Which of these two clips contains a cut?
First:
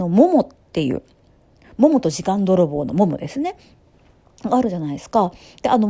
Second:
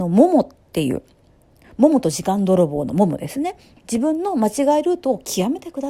second; 1 cut; at 3.8 s

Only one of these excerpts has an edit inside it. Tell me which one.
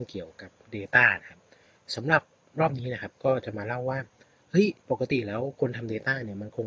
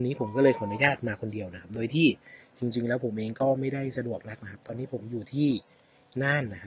first; 1 cut; at 4.8 s

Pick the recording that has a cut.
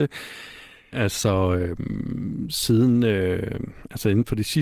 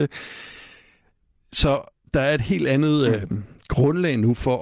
first; 1 cut; at 0.9 s

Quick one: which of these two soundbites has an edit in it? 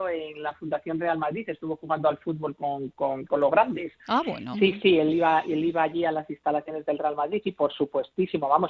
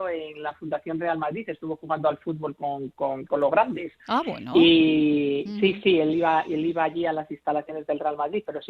first; 2 cuts; at 4.5 s, 7.4 s

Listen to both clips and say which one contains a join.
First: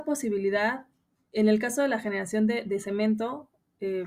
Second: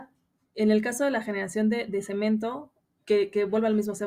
second; 1 cut; at 3.0 s

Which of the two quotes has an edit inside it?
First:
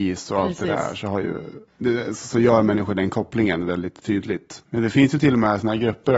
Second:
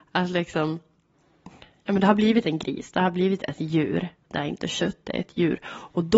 first; 2 cuts; at 1.7 s, 4.6 s

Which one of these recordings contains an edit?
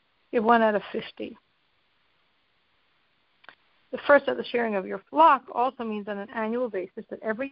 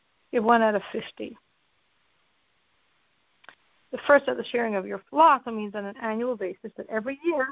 second; 1 cut; at 5.4 s

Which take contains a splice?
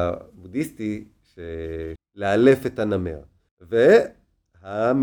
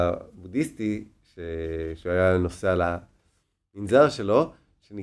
first; 2 cuts; at 2.0 s, 3.5 s

